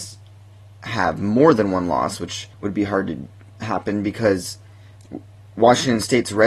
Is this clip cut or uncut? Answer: cut